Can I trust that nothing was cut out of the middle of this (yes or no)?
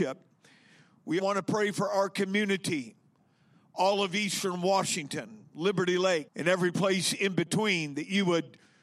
no